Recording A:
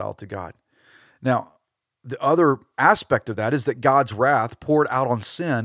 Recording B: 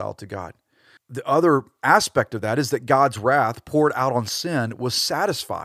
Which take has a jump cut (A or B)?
B